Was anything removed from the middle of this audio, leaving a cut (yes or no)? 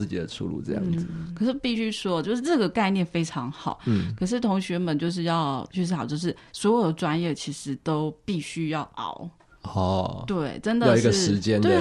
no